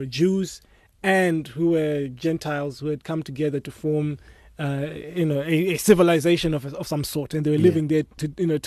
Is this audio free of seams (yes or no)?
yes